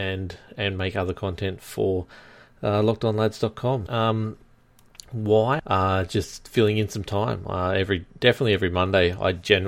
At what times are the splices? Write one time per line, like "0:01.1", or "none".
0:03.9
0:05.6